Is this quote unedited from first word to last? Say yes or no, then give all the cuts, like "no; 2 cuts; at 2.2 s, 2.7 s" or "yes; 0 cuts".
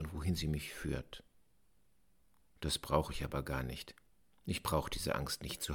yes; 0 cuts